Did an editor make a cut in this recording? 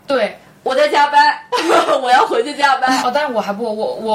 yes; 1 cut; at 3.0 s

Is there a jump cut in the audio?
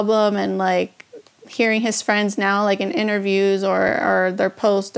no; 0 cuts

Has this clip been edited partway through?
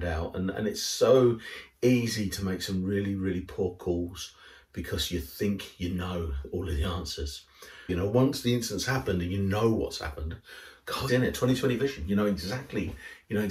yes; 2 cuts; at 7.9 s, 11.1 s

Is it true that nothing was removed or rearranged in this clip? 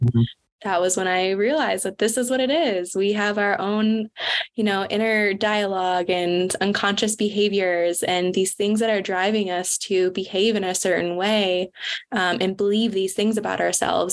no; 1 cut; at 6.6 s

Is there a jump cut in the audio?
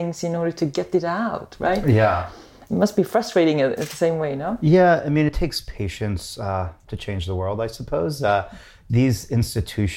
no; 0 cuts

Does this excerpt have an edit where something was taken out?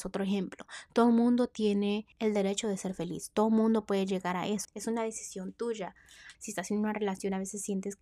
yes; 3 cuts; at 2.1 s, 4.6 s, 6.3 s

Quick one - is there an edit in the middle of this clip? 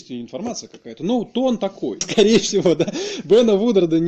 yes; 1 cut; at 2.0 s

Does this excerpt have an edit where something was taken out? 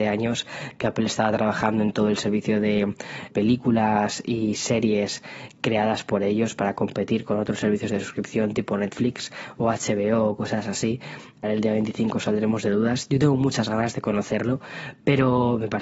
yes; 2 cuts; at 3.3 s, 11.4 s

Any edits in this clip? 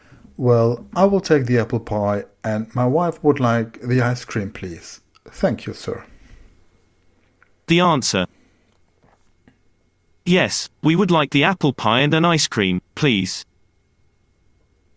no; 0 cuts

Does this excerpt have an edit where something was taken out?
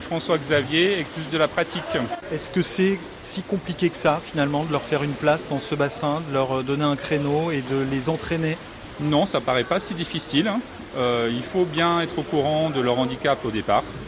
no; 0 cuts

